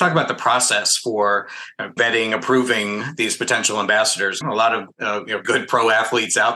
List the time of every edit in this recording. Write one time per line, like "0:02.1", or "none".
0:02.0
0:04.4
0:05.4